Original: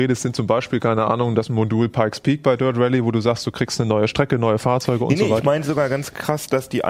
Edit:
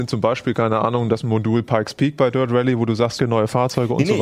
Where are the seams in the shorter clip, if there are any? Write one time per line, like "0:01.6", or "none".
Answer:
0:03.2